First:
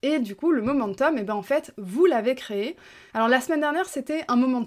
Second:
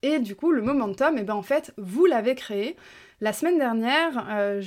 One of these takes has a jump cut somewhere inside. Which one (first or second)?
first